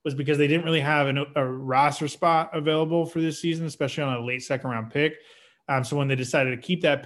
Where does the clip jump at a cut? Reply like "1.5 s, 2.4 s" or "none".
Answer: none